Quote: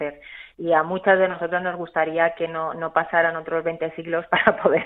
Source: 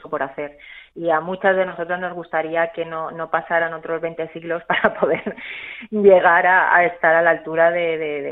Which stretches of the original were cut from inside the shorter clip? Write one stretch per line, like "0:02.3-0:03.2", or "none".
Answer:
none